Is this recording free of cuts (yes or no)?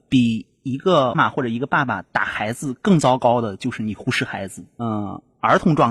no